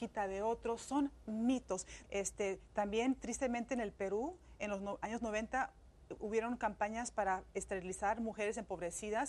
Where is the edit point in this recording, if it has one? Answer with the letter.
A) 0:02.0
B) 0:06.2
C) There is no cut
A